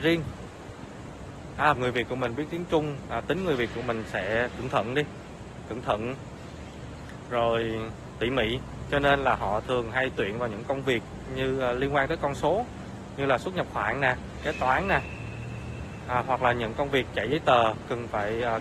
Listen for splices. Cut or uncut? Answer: cut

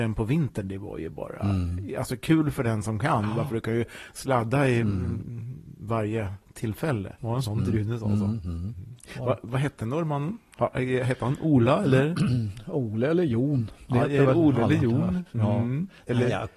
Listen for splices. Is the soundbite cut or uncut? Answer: cut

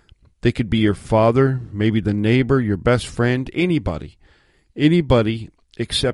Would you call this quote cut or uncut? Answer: uncut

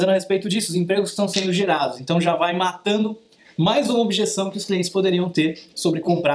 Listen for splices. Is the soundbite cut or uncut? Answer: uncut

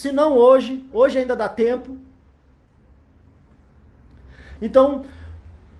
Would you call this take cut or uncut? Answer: cut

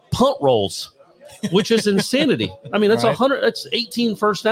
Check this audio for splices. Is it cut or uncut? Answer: uncut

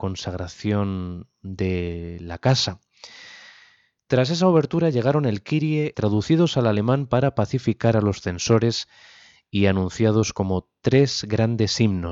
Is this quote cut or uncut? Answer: cut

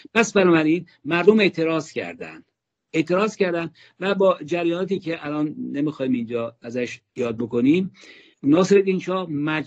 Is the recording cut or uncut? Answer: uncut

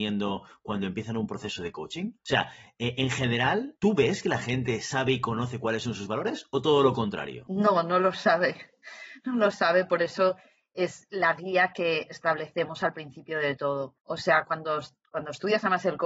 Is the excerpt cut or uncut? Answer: uncut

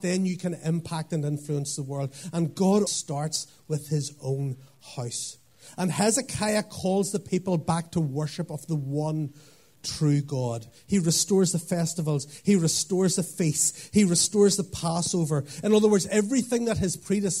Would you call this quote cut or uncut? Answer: cut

